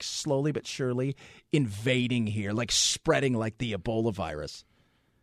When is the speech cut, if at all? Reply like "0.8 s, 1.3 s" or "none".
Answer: none